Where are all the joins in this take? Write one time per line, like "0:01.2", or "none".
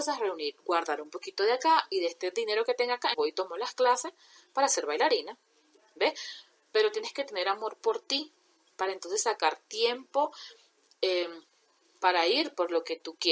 0:03.1